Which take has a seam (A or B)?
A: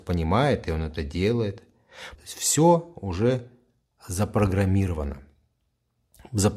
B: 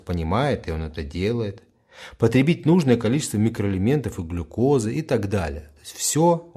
A